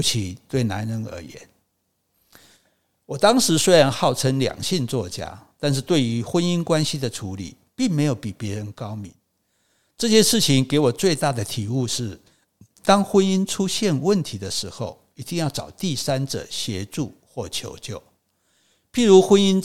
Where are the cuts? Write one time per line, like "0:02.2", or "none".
none